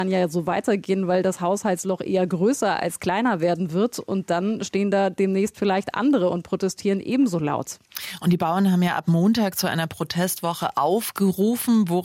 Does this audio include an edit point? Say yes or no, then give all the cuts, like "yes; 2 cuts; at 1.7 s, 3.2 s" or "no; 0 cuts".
no; 0 cuts